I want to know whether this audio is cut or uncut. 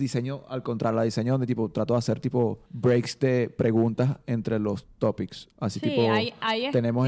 cut